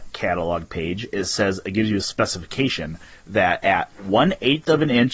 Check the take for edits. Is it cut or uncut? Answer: uncut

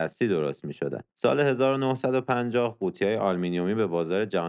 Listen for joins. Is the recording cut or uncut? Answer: cut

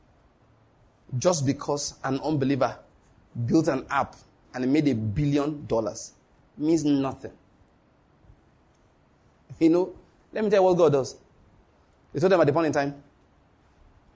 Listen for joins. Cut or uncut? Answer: uncut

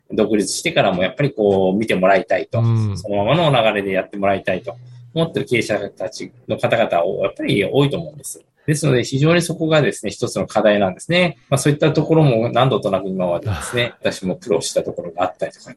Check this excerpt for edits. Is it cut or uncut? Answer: cut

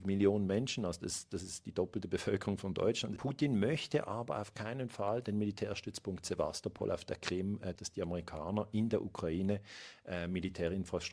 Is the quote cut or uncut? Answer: cut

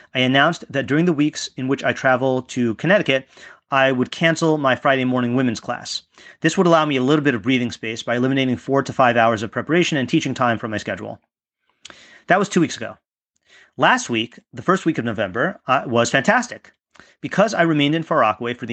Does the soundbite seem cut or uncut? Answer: uncut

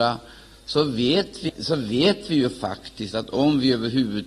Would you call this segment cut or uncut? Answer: cut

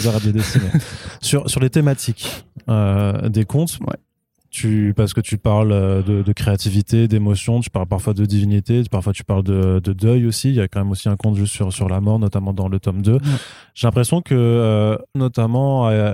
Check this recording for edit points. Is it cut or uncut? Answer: cut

